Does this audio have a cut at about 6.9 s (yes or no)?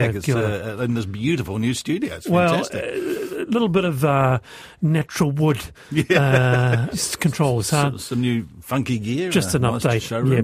yes